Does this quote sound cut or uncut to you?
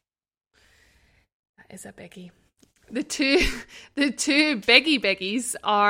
uncut